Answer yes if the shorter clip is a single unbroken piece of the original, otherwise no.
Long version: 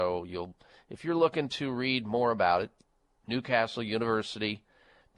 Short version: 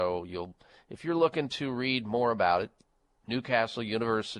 yes